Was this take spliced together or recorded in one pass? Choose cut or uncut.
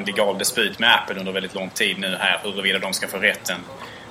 uncut